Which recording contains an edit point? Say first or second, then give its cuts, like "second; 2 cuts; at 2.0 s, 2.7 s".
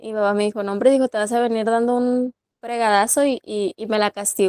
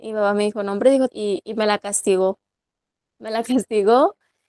second; 1 cut; at 1.1 s